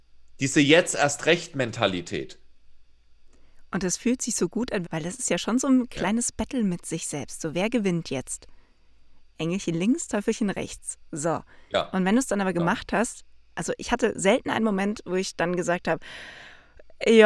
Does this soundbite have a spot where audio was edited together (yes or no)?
yes